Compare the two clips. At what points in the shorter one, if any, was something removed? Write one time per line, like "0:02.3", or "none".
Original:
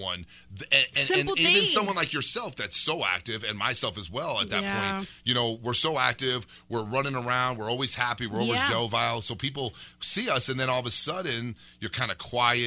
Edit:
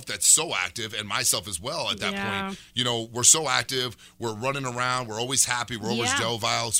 none